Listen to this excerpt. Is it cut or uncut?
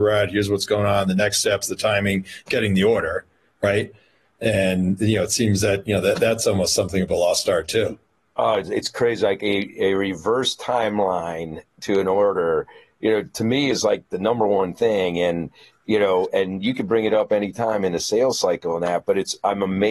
uncut